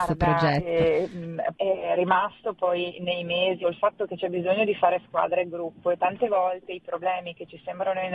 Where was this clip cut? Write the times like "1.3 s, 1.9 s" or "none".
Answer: 1.5 s, 3.6 s